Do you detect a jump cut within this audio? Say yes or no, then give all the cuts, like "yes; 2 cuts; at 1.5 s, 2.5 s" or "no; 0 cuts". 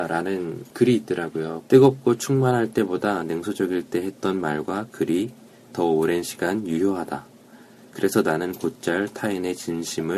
yes; 1 cut; at 1.6 s